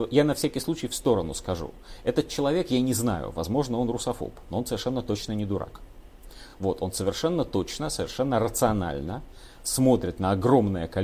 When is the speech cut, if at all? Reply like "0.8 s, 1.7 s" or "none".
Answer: none